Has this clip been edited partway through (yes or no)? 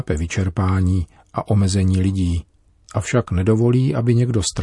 no